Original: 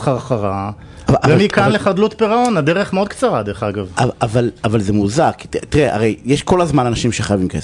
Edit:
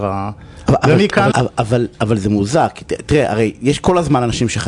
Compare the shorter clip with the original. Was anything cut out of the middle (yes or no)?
yes